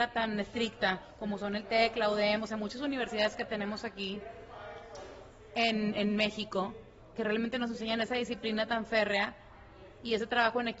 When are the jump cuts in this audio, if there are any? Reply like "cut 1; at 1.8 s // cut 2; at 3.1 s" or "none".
none

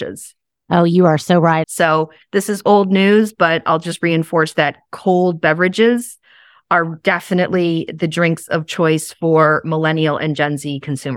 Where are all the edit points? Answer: cut 1; at 1.6 s

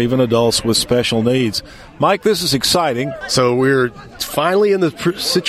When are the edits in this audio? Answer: cut 1; at 3.2 s

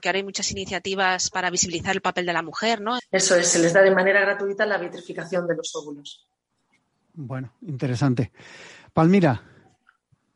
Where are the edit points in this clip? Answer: cut 1; at 3.0 s

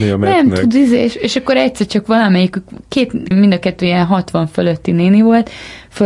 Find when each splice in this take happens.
cut 1; at 3.3 s

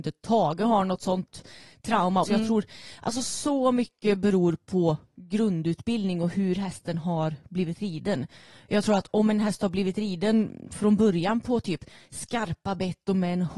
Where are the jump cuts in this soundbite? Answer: cut 1; at 2.2 s

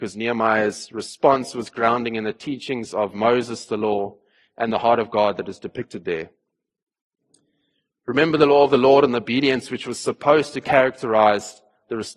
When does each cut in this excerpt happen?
none

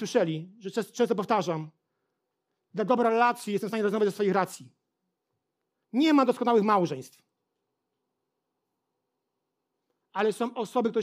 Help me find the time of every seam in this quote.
cut 1; at 5.8 s

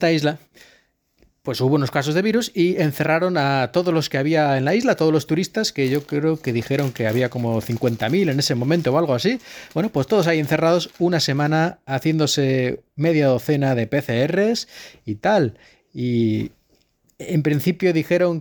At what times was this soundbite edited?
none

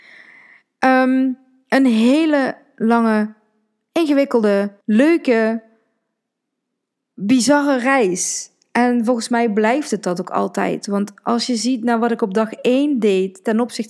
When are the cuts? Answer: cut 1; at 4.8 s

